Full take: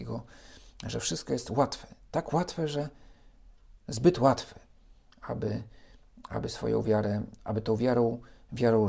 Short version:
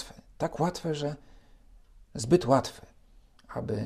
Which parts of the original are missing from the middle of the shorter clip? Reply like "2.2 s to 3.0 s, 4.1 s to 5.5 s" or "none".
none